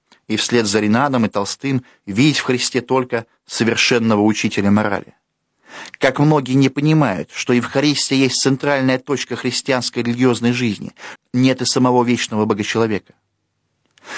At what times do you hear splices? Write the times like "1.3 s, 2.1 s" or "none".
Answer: 11.2 s